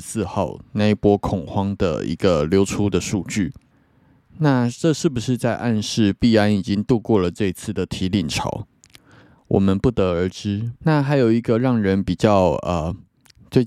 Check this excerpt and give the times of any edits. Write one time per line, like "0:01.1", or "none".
0:10.8